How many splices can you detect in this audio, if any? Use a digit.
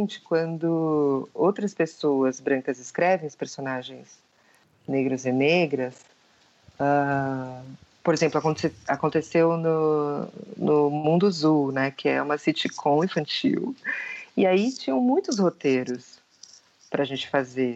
0